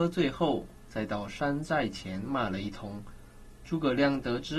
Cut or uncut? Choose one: cut